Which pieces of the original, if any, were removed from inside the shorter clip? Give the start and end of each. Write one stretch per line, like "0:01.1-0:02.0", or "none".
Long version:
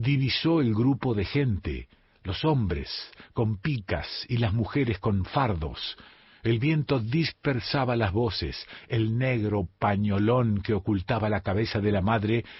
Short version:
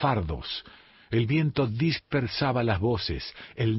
none

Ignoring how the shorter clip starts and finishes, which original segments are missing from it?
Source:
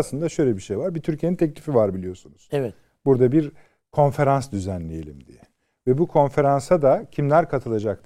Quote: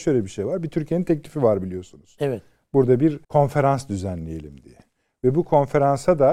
0:03.6-0:03.9

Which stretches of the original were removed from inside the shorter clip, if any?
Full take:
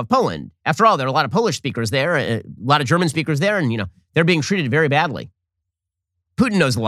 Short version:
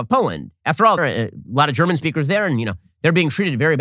0:01.0-0:02.1

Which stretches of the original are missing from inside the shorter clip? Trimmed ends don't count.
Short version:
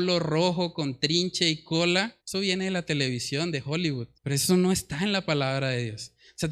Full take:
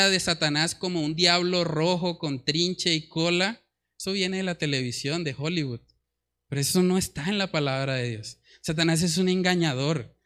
0:03.6-0:03.9
0:05.9-0:06.4

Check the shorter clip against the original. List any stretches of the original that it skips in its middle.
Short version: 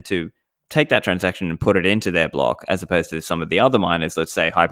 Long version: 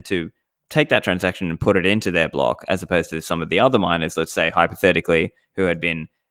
none

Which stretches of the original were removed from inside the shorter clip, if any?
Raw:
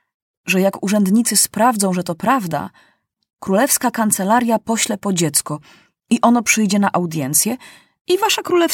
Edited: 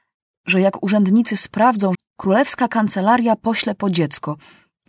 0:01.9-0:03.2

